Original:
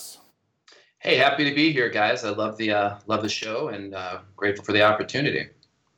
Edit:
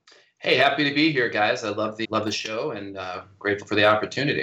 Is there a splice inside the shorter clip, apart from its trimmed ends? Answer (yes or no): yes